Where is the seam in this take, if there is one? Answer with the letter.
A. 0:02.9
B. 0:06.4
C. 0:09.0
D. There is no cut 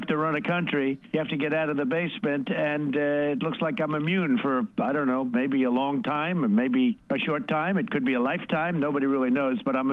D